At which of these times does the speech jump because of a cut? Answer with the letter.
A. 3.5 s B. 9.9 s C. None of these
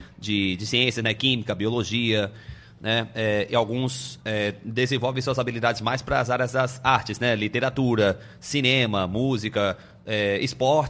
C